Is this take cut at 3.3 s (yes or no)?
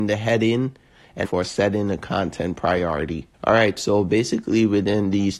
yes